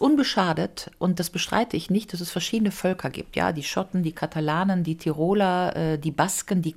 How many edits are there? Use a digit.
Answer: 0